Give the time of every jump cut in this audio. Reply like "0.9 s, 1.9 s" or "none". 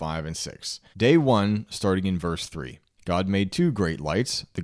0.9 s, 3.0 s